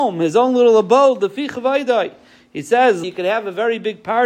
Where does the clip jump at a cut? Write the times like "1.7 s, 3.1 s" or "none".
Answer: 3.0 s